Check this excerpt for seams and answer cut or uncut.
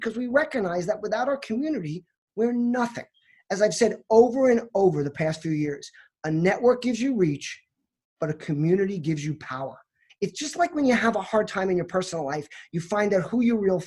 cut